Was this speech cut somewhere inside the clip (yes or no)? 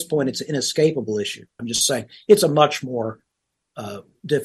yes